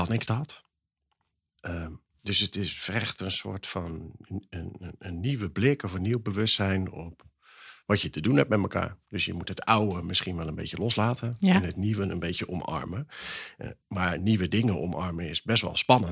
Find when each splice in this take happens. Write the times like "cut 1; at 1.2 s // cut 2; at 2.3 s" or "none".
none